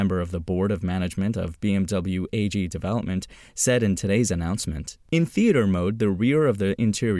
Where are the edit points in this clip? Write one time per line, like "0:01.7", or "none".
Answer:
none